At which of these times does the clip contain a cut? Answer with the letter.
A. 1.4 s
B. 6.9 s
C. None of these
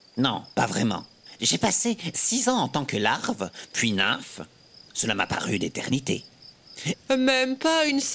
B